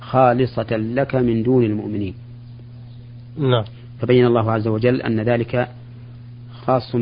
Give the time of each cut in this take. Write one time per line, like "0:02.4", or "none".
none